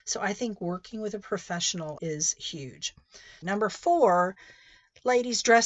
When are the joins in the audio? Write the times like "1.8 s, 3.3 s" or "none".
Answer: 2.0 s, 3.4 s